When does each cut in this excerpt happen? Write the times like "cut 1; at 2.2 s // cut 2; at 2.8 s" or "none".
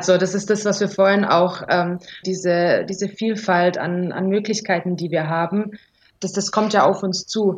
cut 1; at 2.2 s